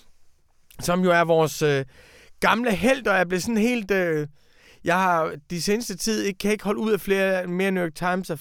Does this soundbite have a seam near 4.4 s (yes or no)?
no